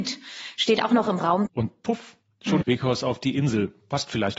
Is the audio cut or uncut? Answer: cut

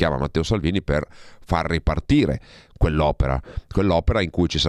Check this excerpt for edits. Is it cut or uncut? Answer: uncut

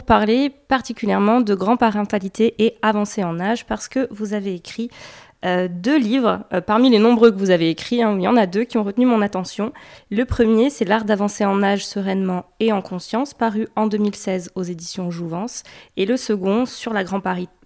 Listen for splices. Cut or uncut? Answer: uncut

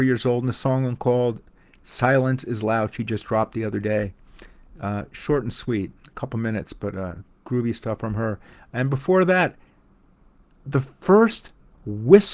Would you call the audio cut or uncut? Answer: uncut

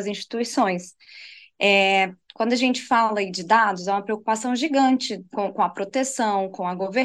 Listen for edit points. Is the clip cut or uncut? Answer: uncut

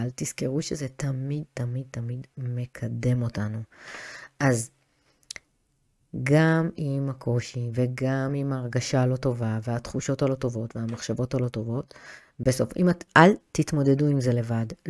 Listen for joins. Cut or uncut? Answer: cut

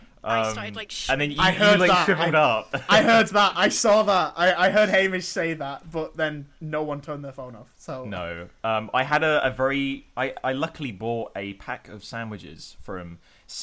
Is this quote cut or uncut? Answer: uncut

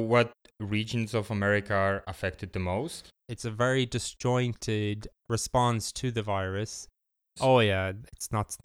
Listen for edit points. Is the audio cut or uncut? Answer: cut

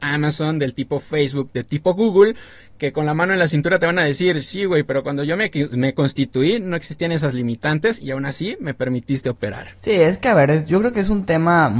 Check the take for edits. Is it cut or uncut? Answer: uncut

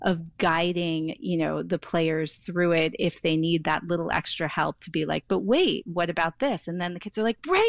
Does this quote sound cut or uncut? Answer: uncut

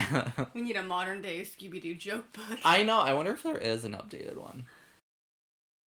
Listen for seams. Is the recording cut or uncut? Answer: uncut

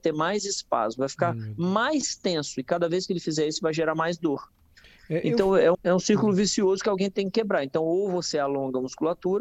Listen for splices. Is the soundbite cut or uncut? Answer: cut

